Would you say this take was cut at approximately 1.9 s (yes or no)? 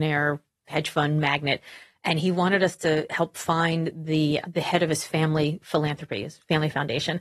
no